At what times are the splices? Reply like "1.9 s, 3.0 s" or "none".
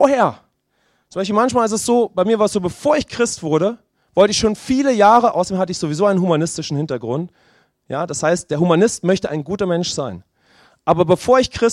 none